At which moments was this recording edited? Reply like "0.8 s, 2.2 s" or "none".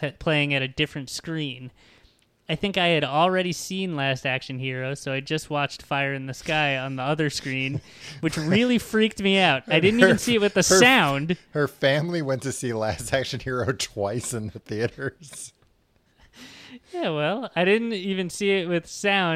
none